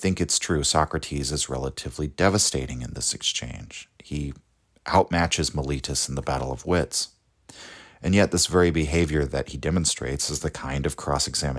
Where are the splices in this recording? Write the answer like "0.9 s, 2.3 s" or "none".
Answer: none